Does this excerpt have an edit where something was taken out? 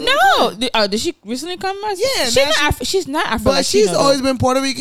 no; 0 cuts

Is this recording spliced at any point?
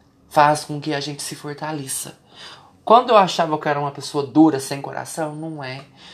no; 0 cuts

